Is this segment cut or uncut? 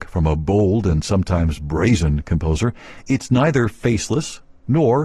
uncut